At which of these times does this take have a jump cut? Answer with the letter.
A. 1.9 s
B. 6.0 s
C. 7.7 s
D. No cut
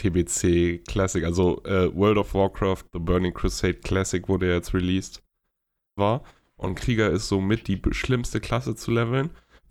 B